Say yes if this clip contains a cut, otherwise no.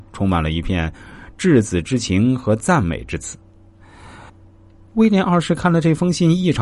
yes